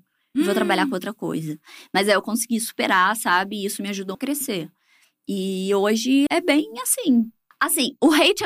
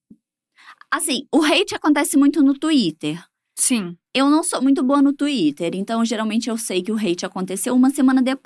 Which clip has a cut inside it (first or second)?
first